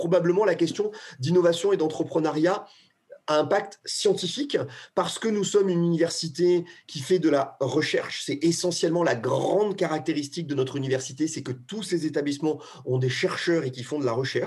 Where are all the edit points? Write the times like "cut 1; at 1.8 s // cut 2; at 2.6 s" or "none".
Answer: none